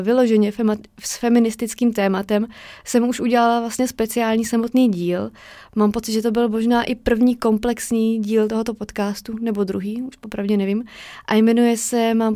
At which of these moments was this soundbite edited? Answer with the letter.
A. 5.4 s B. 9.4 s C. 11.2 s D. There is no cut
D